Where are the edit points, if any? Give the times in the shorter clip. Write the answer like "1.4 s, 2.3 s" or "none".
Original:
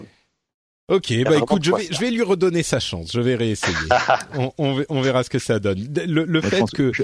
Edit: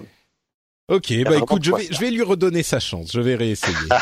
none